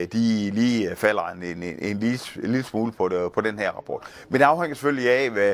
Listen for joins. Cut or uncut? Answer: uncut